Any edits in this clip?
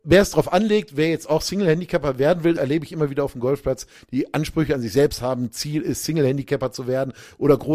yes; 1 cut; at 2.6 s

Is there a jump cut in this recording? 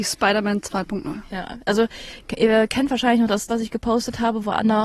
yes; 1 cut; at 3.5 s

